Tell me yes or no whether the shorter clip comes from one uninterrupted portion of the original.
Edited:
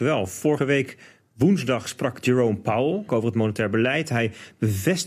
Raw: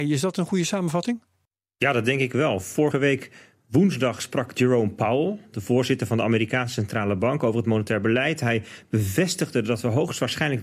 no